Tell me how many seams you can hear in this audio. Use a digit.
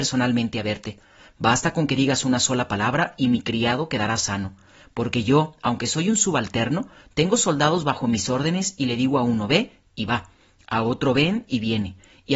0